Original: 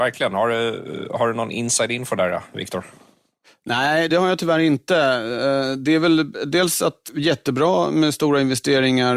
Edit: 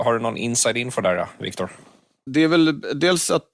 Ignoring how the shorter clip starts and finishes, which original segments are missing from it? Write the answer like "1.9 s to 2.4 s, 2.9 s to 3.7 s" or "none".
3.4 s to 5.8 s